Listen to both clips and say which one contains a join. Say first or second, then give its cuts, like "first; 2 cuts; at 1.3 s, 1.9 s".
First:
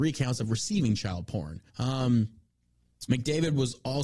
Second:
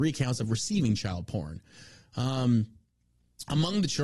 first; 2 cuts; at 1.7 s, 3.1 s